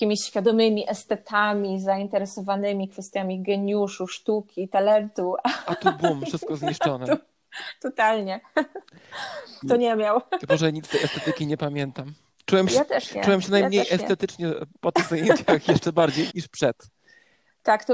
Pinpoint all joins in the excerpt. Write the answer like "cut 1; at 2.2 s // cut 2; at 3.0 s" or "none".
cut 1; at 9.6 s // cut 2; at 16.3 s